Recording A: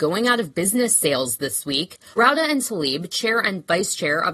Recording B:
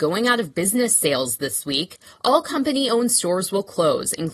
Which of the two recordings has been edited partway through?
A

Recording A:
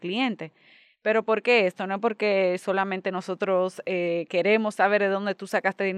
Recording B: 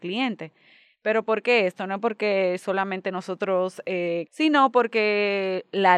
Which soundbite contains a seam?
B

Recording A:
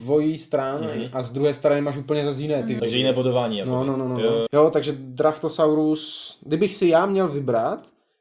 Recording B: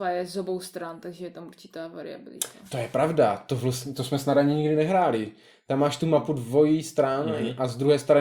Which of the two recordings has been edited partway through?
A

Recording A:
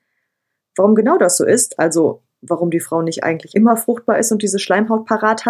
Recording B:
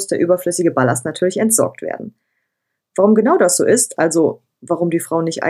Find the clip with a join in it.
A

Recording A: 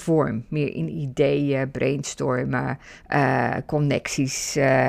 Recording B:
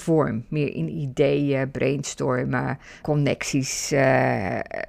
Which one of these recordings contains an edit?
B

